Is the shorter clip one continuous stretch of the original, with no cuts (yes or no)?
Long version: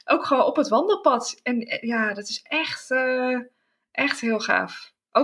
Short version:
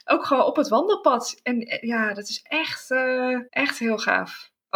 no